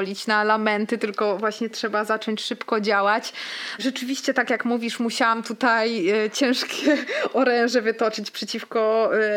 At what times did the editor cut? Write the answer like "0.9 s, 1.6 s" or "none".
3.8 s